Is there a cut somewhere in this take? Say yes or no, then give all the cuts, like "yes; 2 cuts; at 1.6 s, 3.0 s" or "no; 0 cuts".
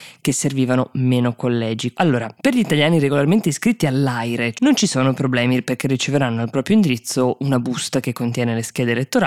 yes; 2 cuts; at 1.9 s, 4.5 s